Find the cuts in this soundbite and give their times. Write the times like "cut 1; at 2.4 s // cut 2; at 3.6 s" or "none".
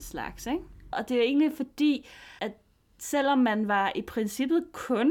cut 1; at 0.9 s // cut 2; at 2.4 s